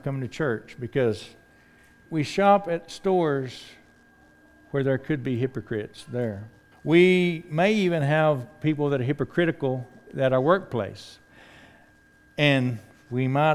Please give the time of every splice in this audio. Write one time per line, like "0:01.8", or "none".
0:02.1
0:06.7